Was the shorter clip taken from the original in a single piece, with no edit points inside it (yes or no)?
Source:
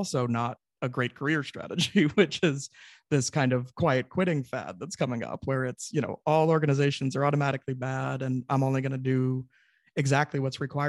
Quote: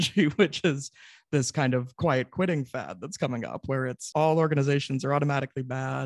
no